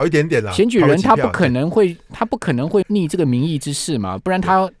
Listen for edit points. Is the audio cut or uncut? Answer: cut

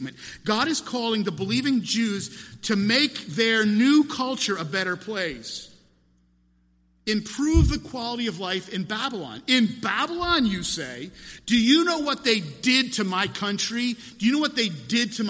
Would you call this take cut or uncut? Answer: uncut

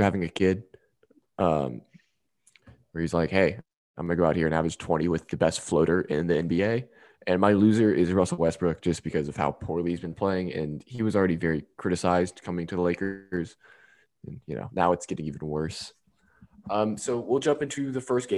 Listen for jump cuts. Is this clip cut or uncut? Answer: uncut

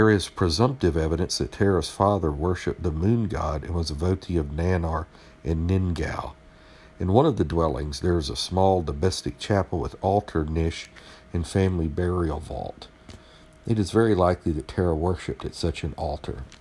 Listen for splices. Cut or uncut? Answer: uncut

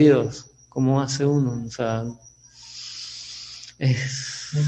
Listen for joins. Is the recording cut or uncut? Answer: uncut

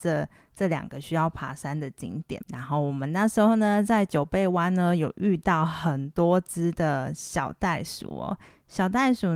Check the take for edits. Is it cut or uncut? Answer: uncut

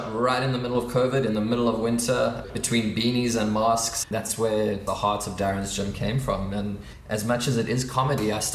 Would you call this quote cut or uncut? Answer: cut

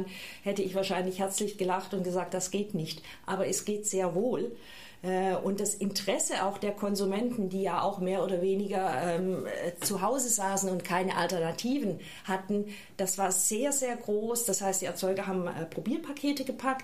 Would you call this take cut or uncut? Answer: uncut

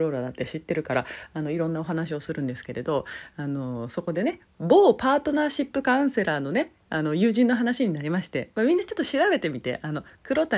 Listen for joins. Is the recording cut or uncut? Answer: cut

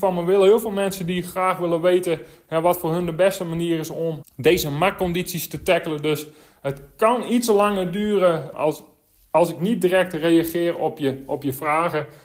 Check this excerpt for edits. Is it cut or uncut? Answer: cut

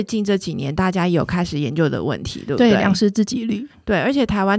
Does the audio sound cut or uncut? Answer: uncut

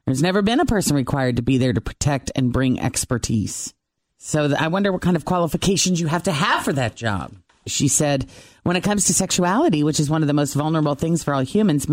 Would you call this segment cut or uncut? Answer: cut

